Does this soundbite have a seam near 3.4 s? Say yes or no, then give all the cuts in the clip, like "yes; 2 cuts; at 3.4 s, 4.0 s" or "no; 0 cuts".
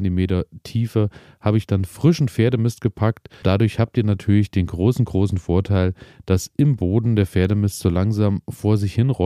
yes; 1 cut; at 3.4 s